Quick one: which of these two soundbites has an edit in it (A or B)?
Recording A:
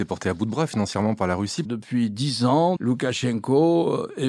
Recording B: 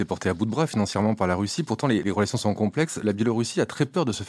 A